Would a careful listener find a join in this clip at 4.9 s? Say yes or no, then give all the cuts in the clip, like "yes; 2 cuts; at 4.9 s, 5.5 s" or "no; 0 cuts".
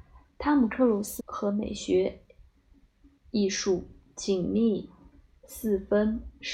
no; 1 cut; at 1.2 s